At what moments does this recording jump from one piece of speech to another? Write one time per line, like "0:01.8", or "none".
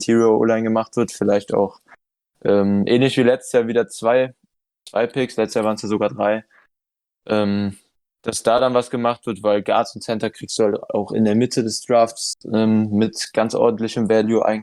none